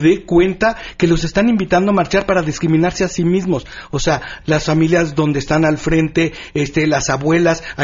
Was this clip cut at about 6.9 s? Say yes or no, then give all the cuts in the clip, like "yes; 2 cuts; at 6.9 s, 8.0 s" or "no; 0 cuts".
no; 1 cut; at 4.4 s